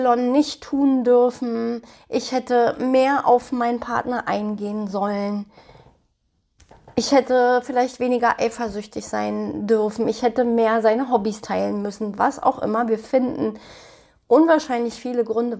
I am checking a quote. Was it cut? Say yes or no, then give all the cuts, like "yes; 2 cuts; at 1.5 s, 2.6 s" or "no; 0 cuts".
no; 0 cuts